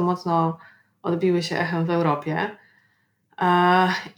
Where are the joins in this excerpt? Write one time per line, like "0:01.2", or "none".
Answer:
none